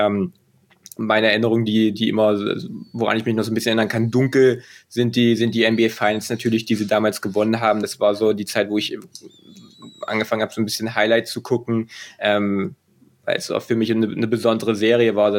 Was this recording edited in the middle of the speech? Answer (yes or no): no